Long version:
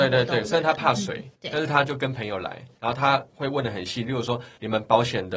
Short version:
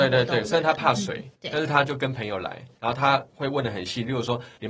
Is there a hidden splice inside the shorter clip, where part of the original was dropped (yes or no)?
no